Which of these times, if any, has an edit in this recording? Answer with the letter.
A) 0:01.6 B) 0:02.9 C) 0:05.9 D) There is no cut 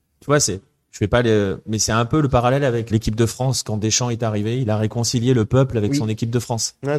B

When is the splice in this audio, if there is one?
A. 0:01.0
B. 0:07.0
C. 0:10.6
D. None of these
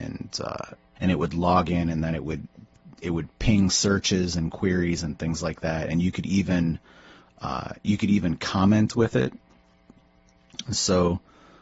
A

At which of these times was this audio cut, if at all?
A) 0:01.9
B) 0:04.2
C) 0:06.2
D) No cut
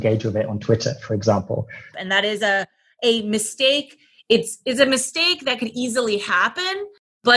A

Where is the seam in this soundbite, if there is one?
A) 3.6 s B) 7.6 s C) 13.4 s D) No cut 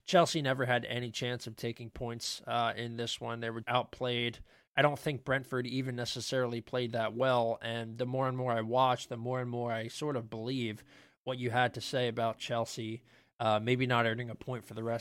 A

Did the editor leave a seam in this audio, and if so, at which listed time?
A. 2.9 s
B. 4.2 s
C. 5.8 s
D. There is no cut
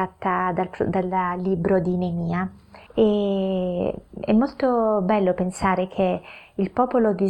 A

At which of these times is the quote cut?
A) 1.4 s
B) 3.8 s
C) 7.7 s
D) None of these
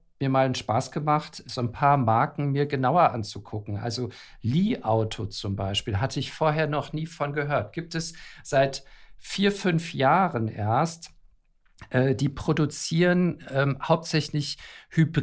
A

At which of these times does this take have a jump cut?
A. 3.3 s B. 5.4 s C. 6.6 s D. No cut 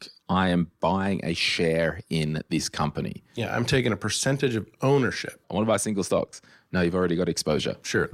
B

